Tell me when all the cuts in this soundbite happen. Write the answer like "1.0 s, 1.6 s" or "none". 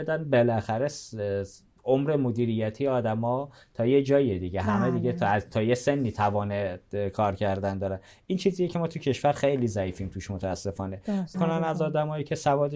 11.3 s